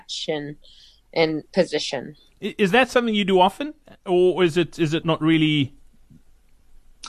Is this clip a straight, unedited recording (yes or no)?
no